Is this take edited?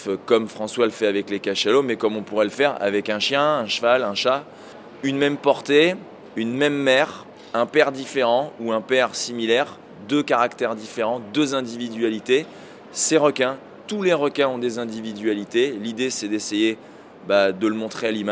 no; 0 cuts

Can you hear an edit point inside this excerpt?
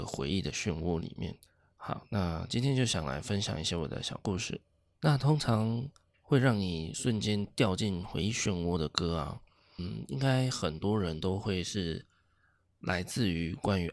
no; 0 cuts

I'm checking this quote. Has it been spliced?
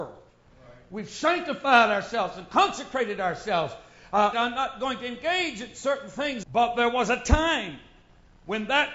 yes; 2 cuts; at 4.3 s, 6.4 s

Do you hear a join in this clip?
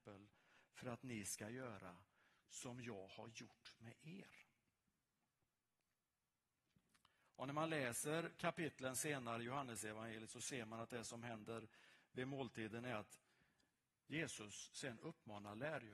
no; 0 cuts

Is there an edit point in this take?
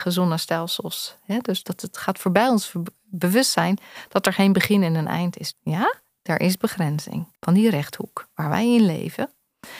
yes; 3 cuts; at 1.6 s, 5.5 s, 7.4 s

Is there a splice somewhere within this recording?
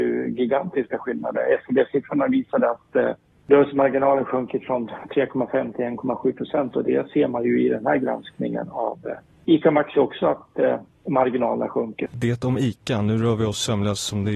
yes; 1 cut; at 12.1 s

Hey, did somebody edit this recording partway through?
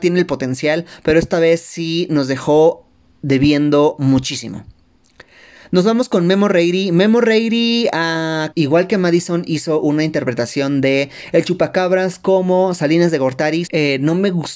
yes; 2 cuts; at 8.5 s, 13.7 s

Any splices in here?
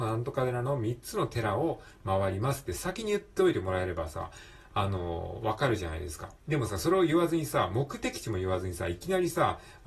yes; 1 cut; at 6.4 s

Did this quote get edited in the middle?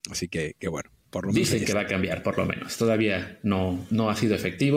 no; 0 cuts

